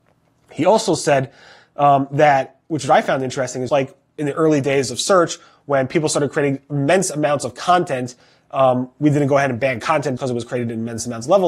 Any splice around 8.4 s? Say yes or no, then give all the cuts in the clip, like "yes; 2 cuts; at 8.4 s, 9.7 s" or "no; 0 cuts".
no; 2 cuts; at 3.7 s, 10.2 s